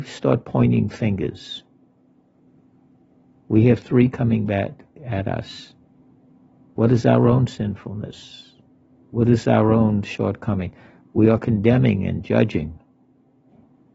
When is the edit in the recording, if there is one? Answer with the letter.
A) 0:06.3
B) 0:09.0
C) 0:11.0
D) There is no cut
C